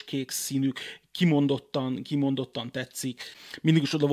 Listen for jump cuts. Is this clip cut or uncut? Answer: uncut